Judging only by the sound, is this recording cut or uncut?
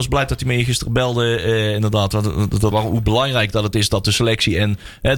cut